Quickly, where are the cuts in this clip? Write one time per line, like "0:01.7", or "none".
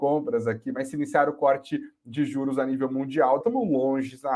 0:03.4